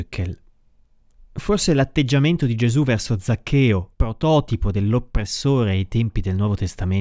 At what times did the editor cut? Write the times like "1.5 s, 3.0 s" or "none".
3.9 s